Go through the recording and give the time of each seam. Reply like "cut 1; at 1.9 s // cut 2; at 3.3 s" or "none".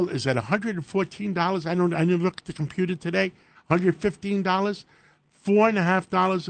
none

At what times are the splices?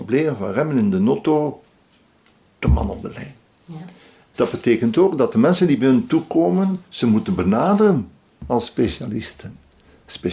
cut 1; at 4.3 s

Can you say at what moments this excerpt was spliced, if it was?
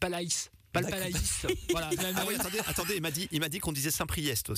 cut 1; at 2.0 s

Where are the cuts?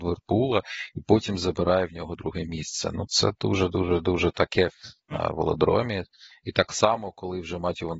cut 1; at 5.1 s

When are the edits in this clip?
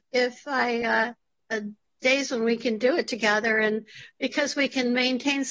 cut 1; at 1.3 s

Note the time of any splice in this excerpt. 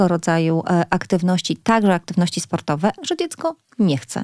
cut 1; at 3.0 s

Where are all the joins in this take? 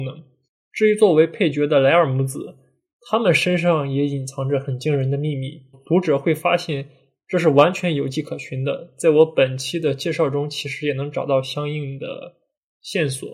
cut 1; at 5.7 s

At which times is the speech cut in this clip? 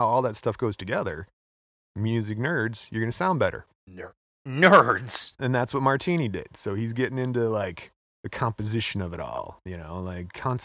cut 1; at 3.7 s // cut 2; at 5.4 s

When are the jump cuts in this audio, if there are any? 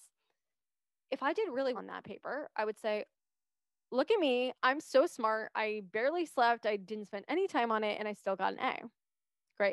cut 1; at 1.7 s

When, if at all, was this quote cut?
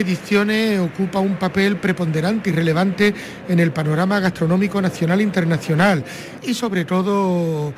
none

